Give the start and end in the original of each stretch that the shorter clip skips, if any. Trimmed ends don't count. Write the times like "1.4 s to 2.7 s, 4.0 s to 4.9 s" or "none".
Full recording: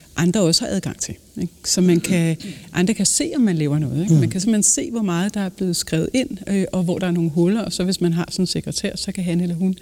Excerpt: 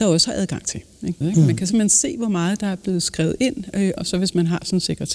1.5 s to 3.9 s, 6.7 s to 7.6 s